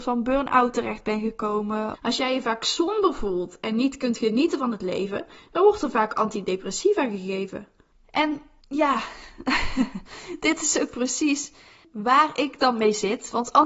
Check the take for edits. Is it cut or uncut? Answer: cut